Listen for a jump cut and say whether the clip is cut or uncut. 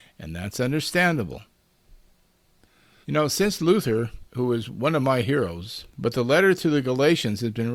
cut